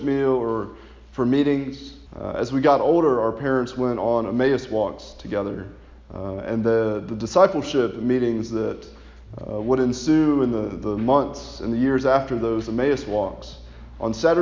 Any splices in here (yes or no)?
yes